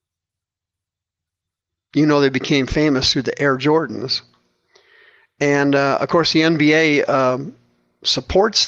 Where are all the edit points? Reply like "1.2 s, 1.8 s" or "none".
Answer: none